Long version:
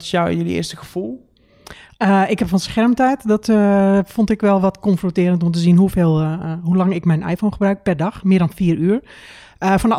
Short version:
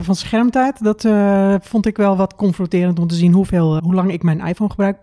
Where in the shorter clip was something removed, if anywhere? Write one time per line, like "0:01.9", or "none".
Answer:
0:03.8